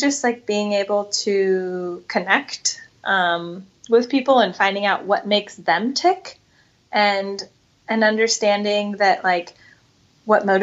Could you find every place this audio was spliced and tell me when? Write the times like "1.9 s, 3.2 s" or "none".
none

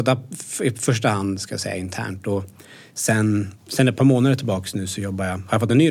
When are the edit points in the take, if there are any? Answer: none

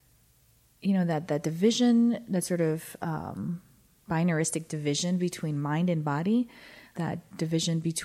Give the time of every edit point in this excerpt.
7.0 s

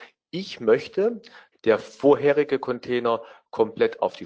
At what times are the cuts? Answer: 1.5 s

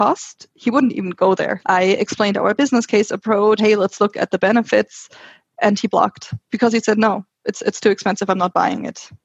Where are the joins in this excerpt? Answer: 1.6 s, 3.6 s

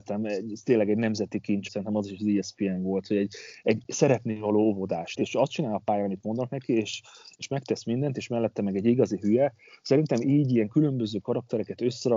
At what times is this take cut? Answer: 1.7 s, 5.2 s

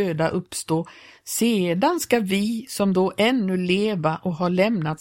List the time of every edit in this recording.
none

